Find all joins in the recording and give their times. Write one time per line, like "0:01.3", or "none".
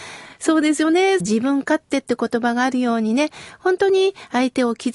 0:01.2